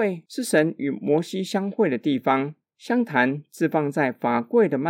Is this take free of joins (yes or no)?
no